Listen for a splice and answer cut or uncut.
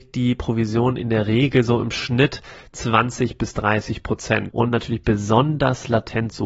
cut